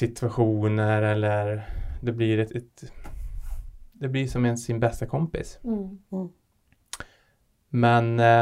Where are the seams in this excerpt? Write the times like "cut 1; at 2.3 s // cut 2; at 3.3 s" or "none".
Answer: cut 1; at 2.5 s